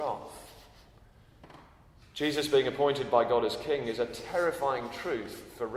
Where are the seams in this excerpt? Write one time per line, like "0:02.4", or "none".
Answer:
none